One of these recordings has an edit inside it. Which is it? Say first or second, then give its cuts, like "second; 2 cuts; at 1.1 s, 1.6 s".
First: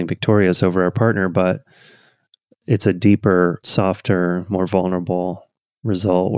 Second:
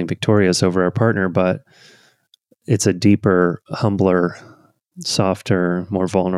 first; 1 cut; at 3.6 s